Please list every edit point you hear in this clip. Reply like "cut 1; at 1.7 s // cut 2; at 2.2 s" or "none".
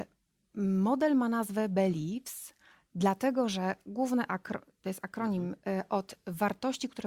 none